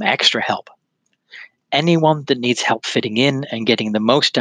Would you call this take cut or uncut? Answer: uncut